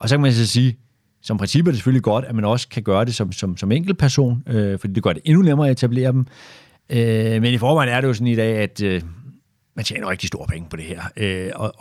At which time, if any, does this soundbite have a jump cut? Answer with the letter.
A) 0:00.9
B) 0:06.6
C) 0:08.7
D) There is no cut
D